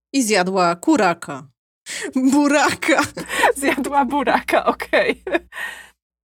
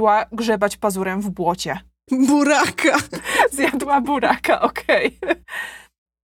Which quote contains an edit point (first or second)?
second